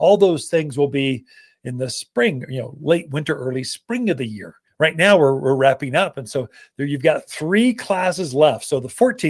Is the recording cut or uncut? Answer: uncut